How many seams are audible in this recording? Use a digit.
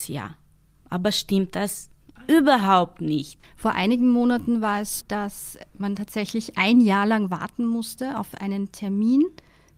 2